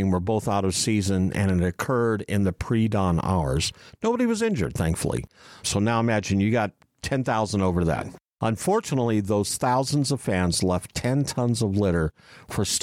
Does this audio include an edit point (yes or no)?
yes